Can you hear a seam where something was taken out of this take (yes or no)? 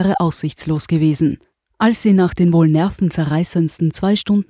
no